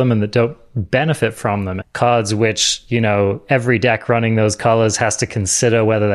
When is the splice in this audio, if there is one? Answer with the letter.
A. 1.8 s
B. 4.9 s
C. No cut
A